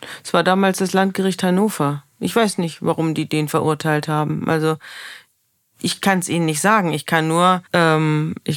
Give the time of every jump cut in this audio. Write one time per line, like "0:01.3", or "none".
0:07.7